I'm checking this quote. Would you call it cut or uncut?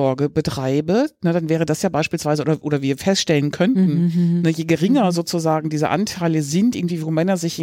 uncut